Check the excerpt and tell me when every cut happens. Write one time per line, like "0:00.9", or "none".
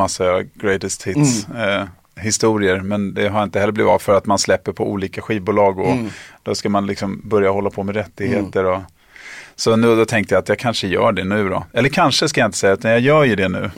none